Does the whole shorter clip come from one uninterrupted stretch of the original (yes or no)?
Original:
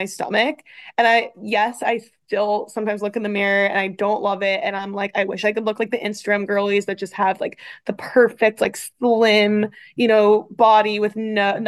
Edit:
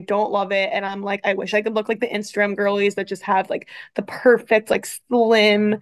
yes